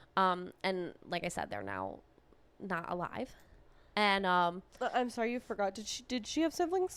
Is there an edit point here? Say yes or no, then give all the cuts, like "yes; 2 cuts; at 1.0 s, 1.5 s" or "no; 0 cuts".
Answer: no; 0 cuts